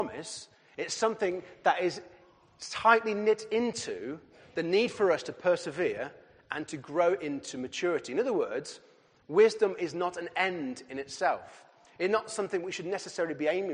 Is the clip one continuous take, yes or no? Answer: yes